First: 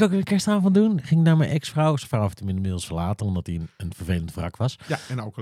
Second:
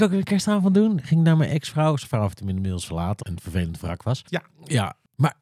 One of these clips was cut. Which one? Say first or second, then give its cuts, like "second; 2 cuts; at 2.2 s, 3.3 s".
second; 2 cuts; at 3.2 s, 4.2 s